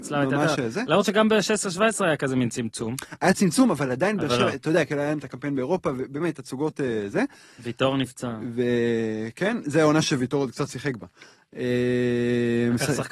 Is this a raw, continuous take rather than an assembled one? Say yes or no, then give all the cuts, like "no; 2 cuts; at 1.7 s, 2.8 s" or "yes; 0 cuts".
yes; 0 cuts